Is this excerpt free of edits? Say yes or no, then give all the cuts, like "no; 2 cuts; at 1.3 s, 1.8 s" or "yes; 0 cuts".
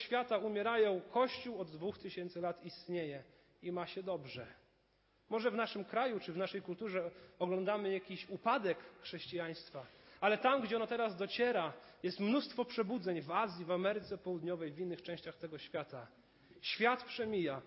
yes; 0 cuts